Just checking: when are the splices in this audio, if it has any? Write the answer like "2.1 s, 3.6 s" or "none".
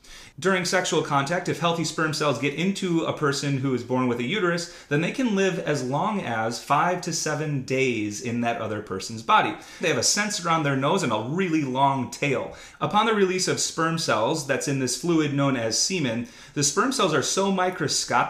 9.8 s, 12.7 s